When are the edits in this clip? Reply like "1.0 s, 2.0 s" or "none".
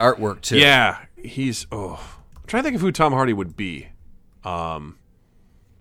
1.2 s